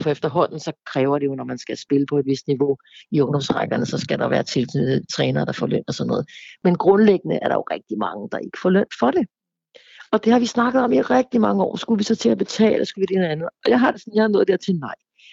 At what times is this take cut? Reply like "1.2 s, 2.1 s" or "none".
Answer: none